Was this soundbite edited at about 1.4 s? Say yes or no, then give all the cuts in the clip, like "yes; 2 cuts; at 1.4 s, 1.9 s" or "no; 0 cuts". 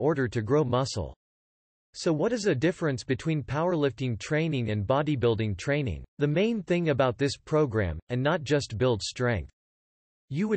no; 2 cuts; at 6.1 s, 8.0 s